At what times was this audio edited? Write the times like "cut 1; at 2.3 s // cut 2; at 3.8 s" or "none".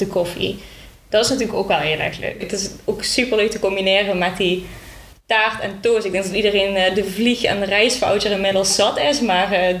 cut 1; at 2.4 s